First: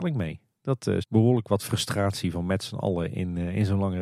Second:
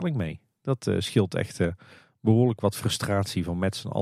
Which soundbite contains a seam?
first; 1 cut; at 1.0 s

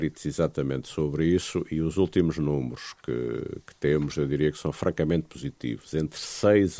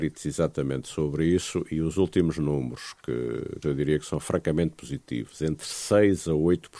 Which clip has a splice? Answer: second; 1 cut; at 3.6 s

